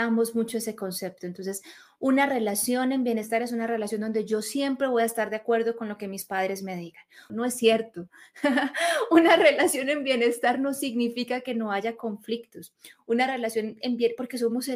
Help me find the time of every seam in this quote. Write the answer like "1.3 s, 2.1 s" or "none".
7.3 s